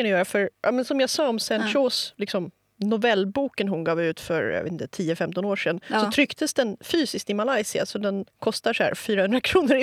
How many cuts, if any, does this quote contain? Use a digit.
0